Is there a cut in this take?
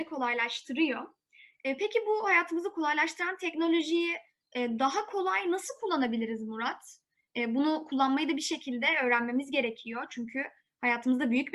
no; 0 cuts

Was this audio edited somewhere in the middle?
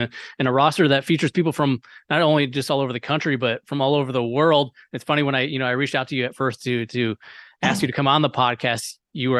no; 0 cuts

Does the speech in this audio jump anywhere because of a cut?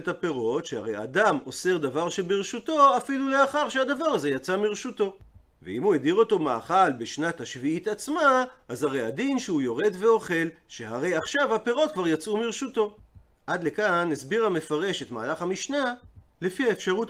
no; 0 cuts

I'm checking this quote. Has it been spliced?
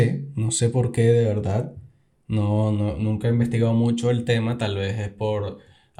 no; 0 cuts

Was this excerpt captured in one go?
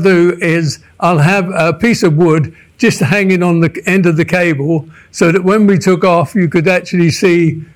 yes; 0 cuts

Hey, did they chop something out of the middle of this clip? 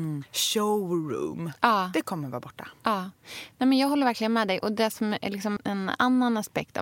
yes; 1 cut; at 5.6 s

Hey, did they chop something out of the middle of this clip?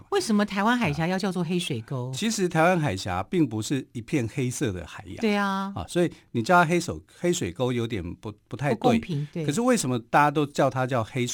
no; 0 cuts

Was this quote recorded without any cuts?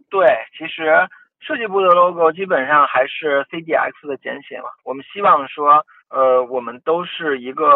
no; 1 cut; at 6.0 s

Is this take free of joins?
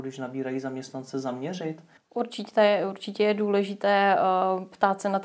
no; 1 cut; at 2.0 s

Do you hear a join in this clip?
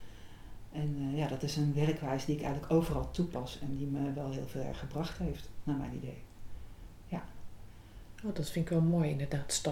no; 0 cuts

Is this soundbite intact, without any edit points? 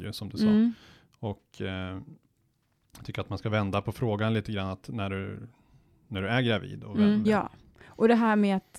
no; 1 cut; at 7.2 s

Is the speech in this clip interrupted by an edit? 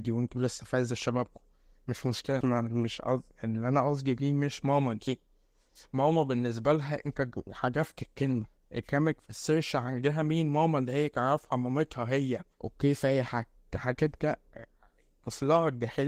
yes; 2 cuts; at 2.4 s, 12.5 s

